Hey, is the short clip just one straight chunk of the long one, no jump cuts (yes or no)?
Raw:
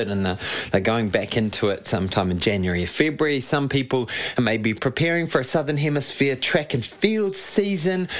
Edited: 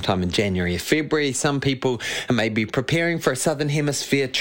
yes